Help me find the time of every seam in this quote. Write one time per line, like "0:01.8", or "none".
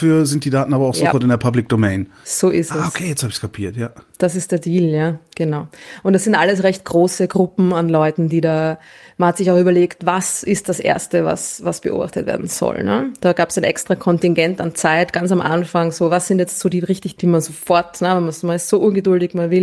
0:17.2